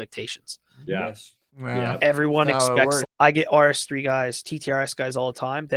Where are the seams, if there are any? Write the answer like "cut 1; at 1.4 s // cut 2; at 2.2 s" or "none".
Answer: cut 1; at 1.5 s // cut 2; at 3.0 s